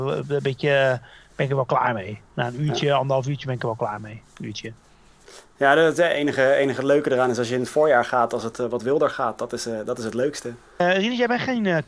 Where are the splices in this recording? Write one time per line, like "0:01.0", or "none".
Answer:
0:08.5